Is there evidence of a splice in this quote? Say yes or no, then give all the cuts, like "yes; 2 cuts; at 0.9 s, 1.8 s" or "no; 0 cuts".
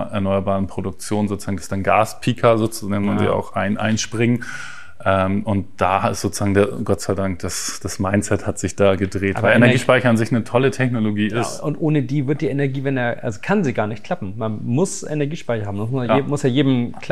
no; 0 cuts